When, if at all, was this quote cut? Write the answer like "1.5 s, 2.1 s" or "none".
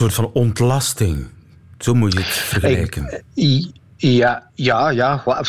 none